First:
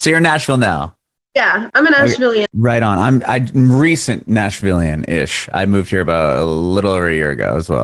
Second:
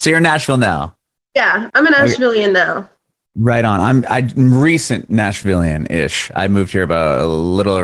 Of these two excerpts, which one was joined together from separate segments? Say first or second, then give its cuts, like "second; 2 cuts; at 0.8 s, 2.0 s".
first; 1 cut; at 2.4 s